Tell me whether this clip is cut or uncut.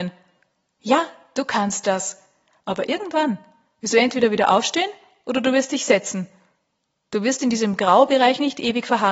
cut